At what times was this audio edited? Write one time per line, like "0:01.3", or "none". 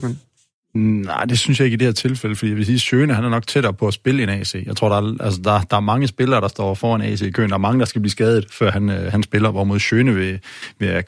none